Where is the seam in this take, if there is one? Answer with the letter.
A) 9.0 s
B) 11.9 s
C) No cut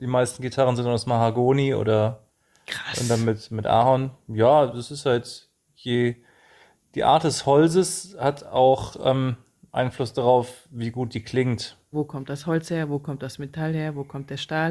B